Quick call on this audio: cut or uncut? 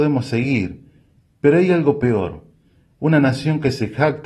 uncut